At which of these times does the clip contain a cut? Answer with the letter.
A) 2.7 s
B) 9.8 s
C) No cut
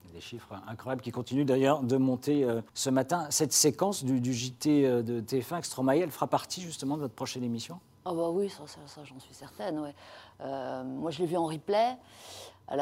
A